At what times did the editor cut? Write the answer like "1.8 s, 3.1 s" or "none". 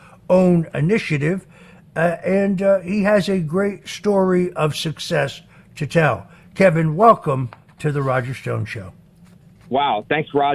none